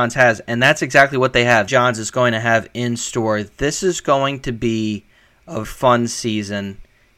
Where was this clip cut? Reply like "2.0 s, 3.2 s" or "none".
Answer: 1.7 s, 5.6 s